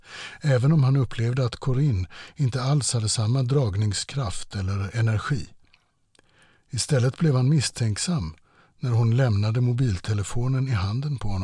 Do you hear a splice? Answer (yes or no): no